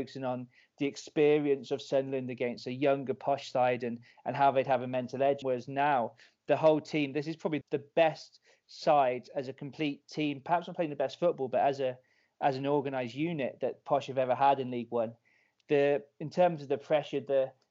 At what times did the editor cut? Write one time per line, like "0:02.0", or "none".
0:05.4
0:07.6